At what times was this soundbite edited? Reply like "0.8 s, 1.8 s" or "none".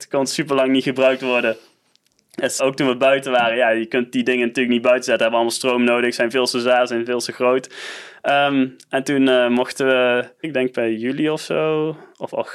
2.6 s, 10.4 s